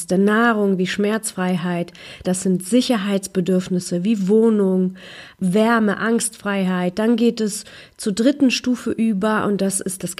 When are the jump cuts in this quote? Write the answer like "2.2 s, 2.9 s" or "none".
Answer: 2.2 s